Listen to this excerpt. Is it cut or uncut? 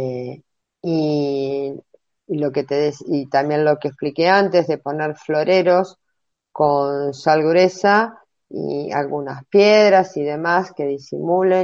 uncut